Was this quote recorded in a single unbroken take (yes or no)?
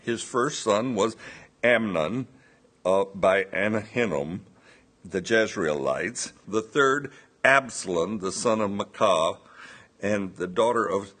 no